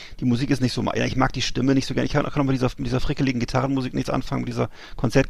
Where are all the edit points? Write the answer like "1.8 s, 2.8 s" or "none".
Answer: none